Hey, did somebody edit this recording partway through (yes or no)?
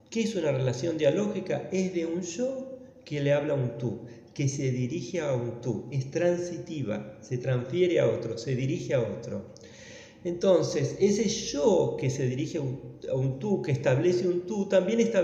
no